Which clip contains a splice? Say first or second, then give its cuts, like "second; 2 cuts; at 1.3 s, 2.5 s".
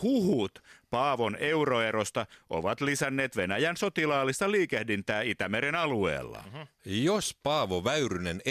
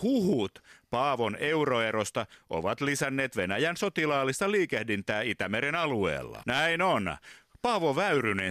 second; 1 cut; at 6.4 s